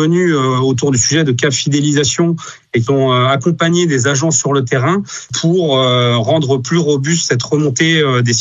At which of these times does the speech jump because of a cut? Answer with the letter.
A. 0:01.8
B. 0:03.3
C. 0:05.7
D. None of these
D